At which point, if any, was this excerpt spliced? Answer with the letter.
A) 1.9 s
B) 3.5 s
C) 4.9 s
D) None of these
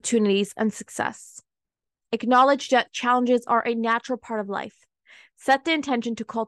A